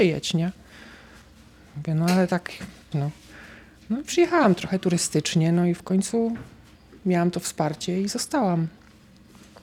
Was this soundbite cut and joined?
yes; 1 cut; at 2.9 s

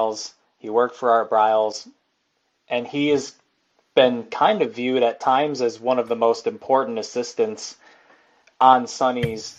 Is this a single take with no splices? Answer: yes; 0 cuts

